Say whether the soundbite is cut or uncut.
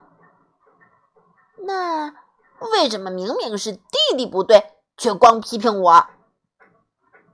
uncut